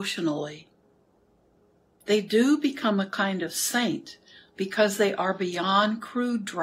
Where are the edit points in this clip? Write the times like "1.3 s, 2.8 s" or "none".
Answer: 2.0 s